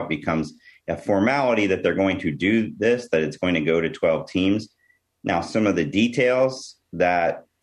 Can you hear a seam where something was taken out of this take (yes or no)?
no